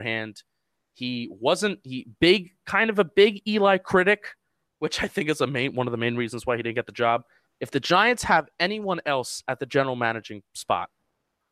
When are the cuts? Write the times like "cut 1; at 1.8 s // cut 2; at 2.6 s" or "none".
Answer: cut 1; at 7.5 s